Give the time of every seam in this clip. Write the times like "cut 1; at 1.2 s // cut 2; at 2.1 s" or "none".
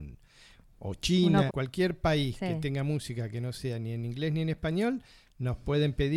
cut 1; at 1.5 s